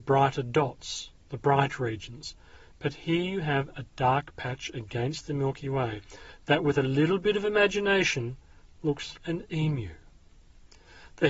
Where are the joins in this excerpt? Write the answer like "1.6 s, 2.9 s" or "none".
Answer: 9.2 s